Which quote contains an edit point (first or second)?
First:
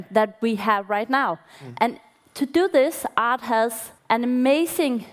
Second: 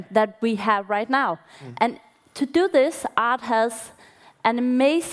first